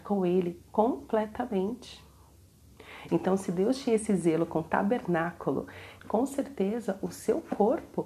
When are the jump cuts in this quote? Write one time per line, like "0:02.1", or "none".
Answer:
0:03.1
0:06.0